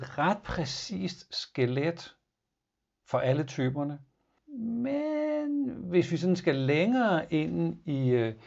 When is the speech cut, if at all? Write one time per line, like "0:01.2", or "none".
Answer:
0:04.4

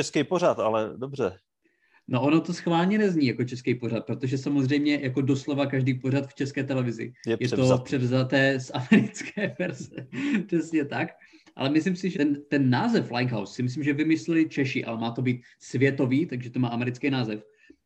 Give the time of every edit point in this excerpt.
0:12.1

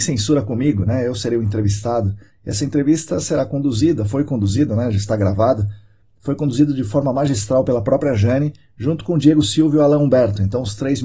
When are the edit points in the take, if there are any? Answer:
none

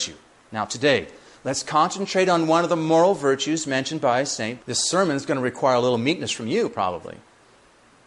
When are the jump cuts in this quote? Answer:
0:04.6

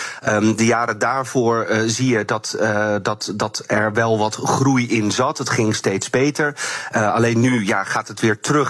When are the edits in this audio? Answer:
none

